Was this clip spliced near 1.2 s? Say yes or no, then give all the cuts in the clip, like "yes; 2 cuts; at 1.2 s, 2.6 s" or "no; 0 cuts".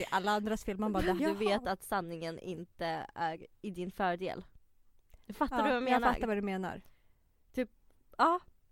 yes; 1 cut; at 1.2 s